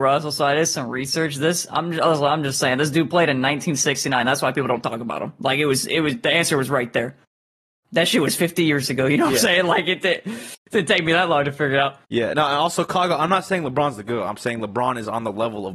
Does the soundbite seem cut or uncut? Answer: uncut